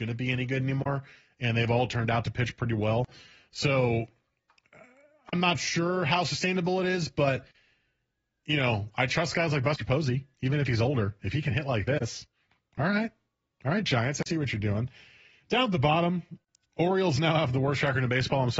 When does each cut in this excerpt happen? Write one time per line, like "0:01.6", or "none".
none